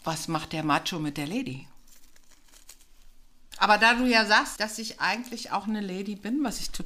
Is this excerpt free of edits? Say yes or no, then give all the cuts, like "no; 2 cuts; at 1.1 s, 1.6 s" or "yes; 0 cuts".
no; 2 cuts; at 3.5 s, 4.6 s